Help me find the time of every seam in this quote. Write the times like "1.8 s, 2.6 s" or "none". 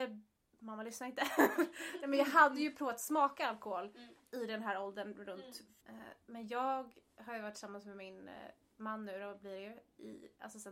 5.8 s